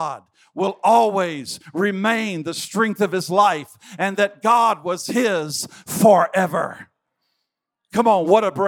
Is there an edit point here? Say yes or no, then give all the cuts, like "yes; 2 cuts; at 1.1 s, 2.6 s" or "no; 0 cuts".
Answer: no; 0 cuts